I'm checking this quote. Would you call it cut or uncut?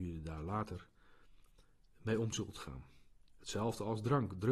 uncut